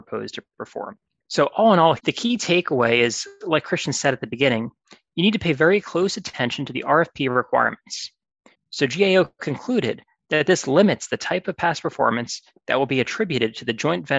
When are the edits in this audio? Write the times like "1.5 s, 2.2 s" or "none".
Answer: 2.0 s, 8.5 s